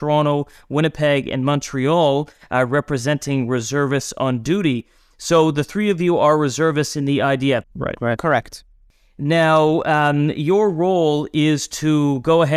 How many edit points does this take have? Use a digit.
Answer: 1